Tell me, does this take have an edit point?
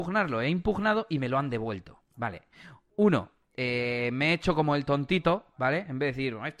no; 0 cuts

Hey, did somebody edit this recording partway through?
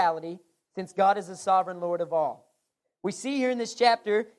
no; 0 cuts

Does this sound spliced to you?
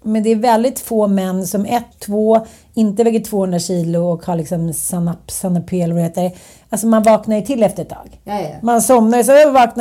yes; 1 cut; at 1.9 s

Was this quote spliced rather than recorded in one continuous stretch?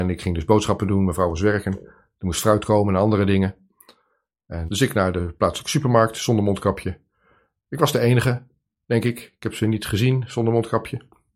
yes; 1 cut; at 4.7 s

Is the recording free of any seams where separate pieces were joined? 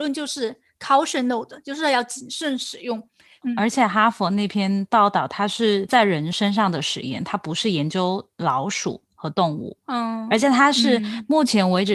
yes; 0 cuts

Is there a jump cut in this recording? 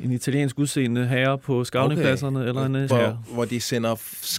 yes; 1 cut; at 2.9 s

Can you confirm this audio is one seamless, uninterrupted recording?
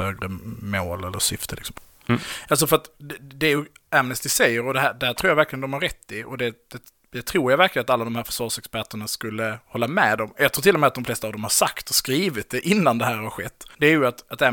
yes; 0 cuts

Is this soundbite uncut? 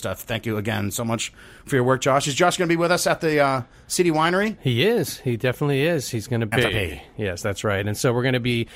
no; 1 cut; at 6.5 s

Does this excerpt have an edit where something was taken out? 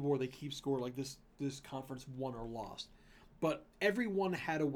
no; 0 cuts

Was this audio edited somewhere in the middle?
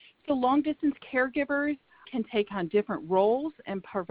yes; 1 cut; at 2.0 s

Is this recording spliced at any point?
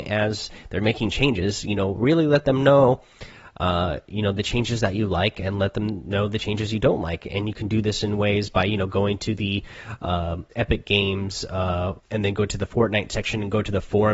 yes; 1 cut; at 12.0 s

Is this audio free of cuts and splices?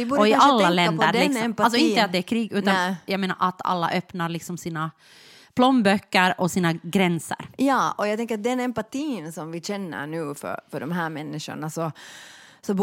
yes; 0 cuts

